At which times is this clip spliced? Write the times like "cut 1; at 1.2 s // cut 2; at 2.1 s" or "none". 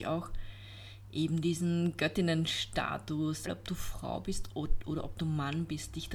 cut 1; at 3.5 s